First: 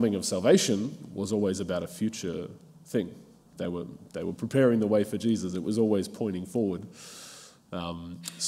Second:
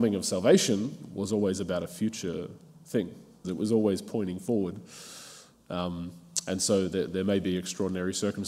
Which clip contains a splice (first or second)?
second